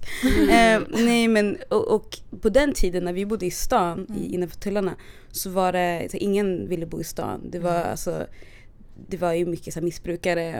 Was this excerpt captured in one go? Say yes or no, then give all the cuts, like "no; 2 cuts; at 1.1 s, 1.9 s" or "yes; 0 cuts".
no; 1 cut; at 9.1 s